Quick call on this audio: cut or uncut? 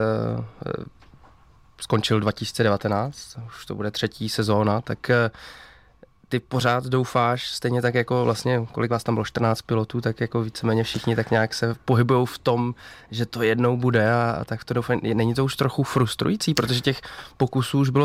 uncut